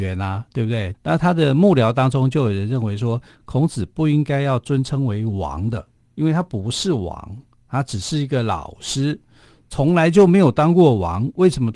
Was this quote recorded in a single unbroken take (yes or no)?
no